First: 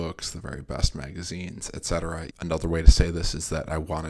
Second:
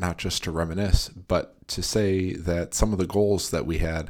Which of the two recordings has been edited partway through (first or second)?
first